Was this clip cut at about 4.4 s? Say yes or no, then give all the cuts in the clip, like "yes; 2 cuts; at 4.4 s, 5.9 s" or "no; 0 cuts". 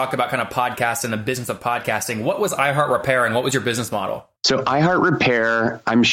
yes; 1 cut; at 4.4 s